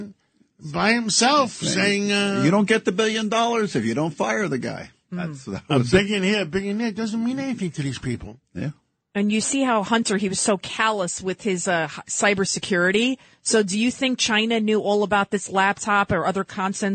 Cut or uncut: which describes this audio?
uncut